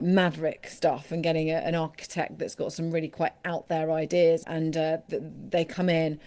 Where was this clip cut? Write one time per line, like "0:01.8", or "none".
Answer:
0:04.4